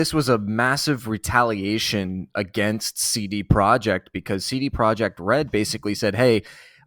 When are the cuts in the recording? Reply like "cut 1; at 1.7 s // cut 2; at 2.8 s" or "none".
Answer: none